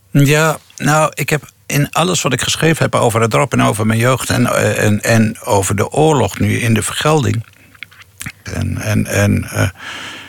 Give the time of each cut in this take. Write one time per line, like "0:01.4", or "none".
0:05.0
0:08.5